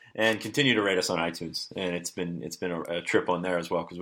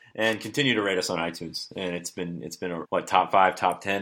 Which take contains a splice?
second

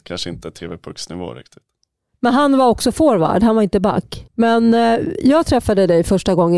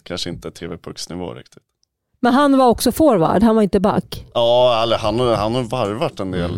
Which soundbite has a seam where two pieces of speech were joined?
first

